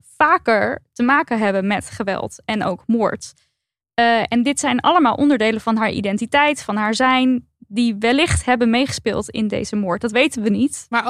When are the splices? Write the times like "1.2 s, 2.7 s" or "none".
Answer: none